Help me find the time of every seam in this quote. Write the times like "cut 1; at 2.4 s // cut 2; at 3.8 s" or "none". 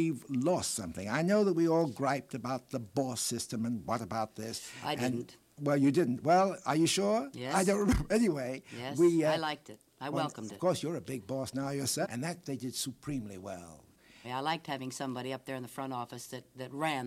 cut 1; at 12.0 s // cut 2; at 14.2 s